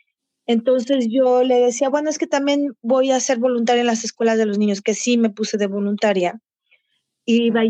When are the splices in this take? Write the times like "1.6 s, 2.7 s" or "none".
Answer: none